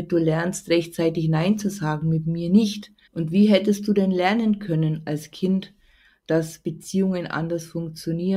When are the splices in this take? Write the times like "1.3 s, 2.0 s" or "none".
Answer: 3.1 s